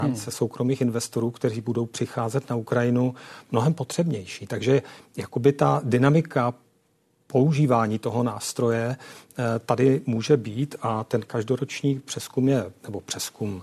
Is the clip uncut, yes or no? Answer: yes